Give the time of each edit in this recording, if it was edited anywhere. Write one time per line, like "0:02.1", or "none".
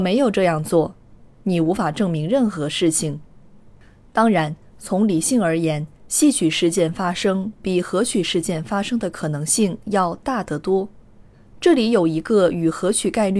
0:01.3